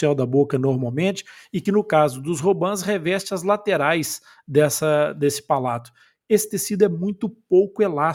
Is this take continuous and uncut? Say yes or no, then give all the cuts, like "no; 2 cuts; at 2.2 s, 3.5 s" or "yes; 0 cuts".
yes; 0 cuts